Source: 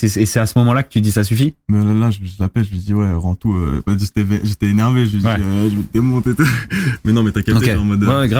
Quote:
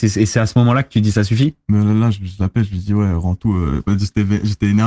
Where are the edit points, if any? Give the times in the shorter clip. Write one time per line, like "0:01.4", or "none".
none